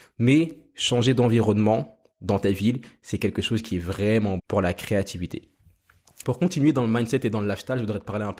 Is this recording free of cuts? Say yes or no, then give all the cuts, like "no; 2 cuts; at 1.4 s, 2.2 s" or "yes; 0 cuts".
no; 2 cuts; at 4.4 s, 6.2 s